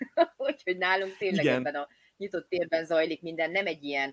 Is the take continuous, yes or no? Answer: yes